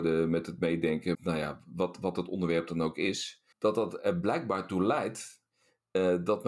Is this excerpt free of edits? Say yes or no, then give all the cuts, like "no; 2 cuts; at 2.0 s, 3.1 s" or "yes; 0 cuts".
no; 2 cuts; at 1.1 s, 3.5 s